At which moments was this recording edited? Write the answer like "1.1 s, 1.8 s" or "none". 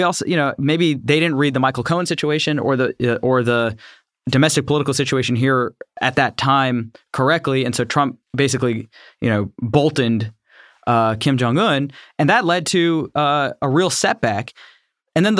none